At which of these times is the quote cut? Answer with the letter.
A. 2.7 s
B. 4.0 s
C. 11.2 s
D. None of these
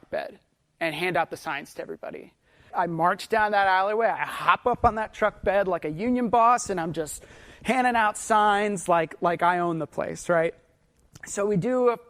A